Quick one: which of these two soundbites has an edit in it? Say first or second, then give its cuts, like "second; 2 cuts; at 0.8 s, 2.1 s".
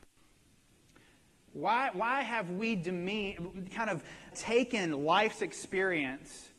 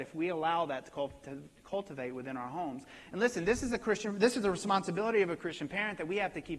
first; 2 cuts; at 1.5 s, 4.3 s